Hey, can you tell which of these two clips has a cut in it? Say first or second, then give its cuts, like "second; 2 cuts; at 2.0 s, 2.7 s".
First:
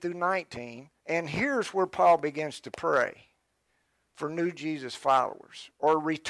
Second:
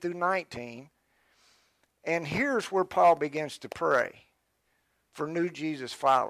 first; 1 cut; at 1.0 s